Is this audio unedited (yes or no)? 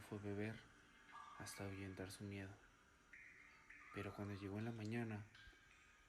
yes